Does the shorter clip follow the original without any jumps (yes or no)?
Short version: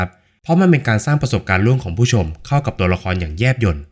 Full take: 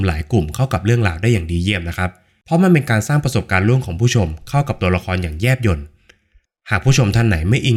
yes